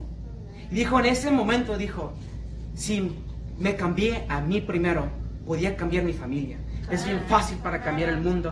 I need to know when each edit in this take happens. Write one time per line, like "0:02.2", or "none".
0:06.9